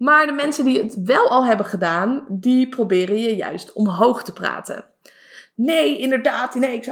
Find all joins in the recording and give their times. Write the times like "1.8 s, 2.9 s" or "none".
5.5 s

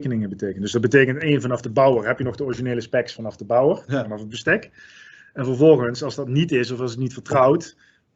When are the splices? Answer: none

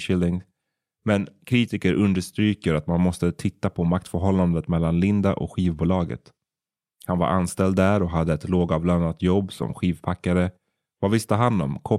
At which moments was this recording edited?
none

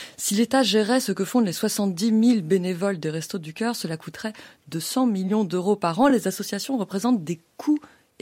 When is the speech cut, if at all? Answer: none

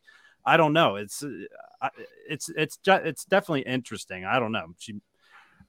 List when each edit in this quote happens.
none

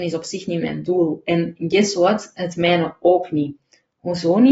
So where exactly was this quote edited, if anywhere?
none

